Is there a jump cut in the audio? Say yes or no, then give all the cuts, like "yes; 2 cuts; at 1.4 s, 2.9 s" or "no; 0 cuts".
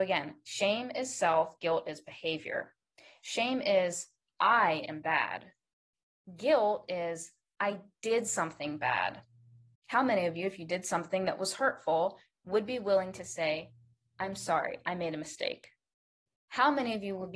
no; 0 cuts